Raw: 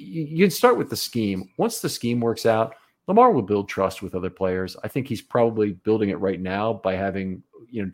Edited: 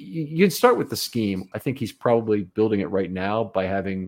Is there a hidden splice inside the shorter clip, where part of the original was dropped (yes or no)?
yes